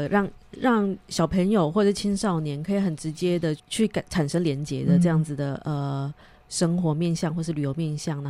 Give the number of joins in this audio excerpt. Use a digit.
1